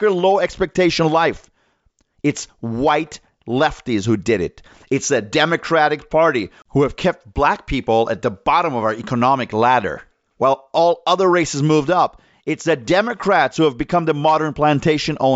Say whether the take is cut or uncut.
uncut